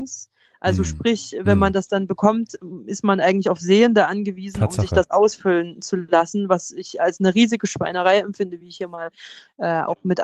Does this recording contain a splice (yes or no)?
no